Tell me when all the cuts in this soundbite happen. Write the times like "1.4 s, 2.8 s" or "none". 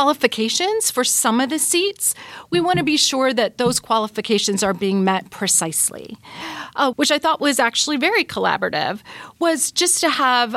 6.9 s